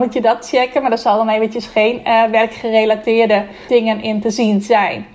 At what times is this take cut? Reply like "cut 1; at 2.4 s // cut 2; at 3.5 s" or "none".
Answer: cut 1; at 3.7 s

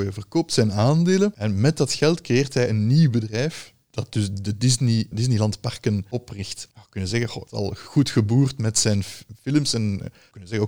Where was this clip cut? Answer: cut 1; at 5.1 s

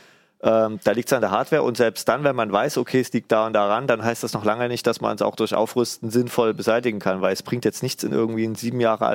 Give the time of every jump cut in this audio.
none

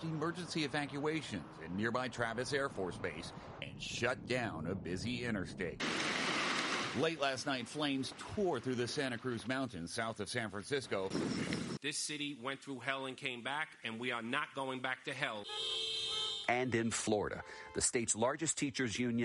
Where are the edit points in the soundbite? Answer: cut 1; at 11.8 s

